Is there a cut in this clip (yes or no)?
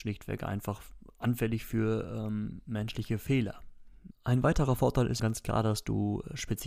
yes